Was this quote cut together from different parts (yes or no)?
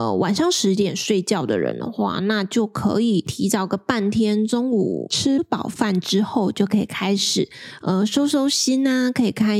no